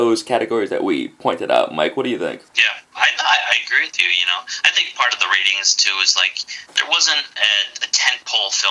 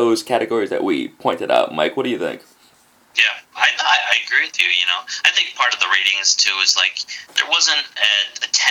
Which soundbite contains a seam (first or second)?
first